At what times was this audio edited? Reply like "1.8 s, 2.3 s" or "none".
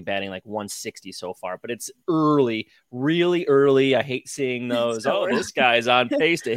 none